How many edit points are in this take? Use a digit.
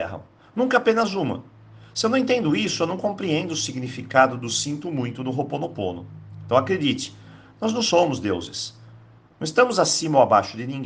0